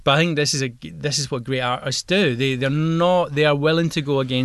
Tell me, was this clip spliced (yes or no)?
no